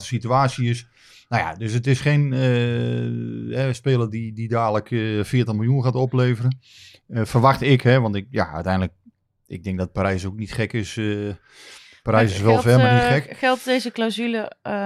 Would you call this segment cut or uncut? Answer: uncut